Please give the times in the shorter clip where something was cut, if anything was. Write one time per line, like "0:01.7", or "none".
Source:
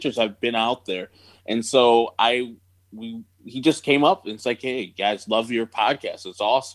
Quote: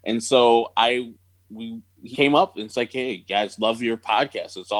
0:02.1